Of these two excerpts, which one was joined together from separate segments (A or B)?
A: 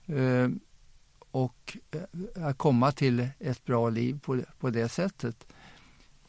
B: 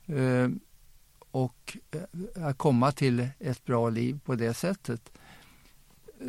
B